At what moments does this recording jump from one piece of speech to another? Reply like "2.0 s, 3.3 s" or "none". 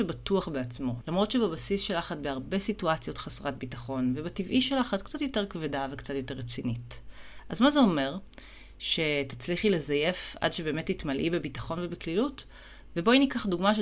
1.0 s, 12.9 s